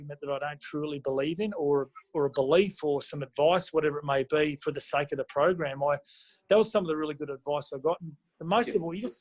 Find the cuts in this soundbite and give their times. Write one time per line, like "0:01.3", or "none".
none